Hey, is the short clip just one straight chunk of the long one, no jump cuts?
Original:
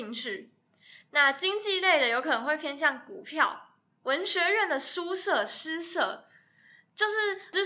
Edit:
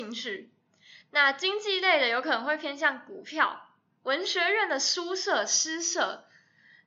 yes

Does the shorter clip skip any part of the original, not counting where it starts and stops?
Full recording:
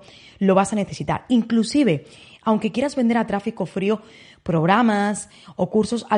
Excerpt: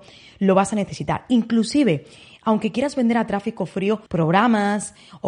yes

